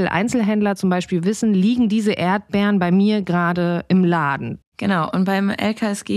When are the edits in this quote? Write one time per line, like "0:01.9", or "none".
0:04.6